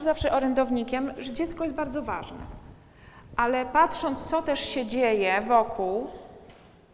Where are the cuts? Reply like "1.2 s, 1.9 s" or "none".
1.2 s